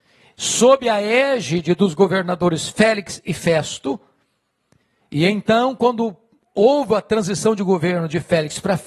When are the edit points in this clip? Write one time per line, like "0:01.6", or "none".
none